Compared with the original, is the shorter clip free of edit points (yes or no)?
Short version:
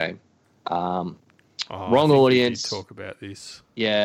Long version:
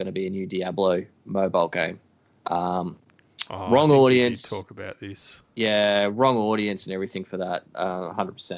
yes